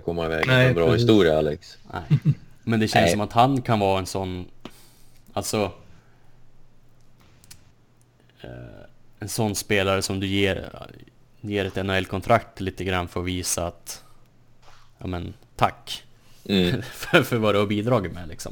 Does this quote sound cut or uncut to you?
uncut